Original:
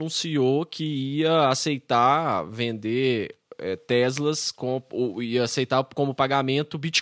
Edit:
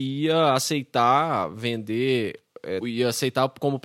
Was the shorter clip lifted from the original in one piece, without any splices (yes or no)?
no